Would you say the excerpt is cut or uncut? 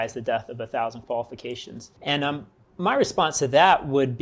cut